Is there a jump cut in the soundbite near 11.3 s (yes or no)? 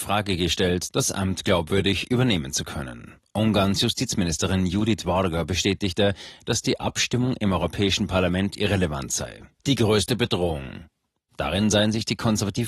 yes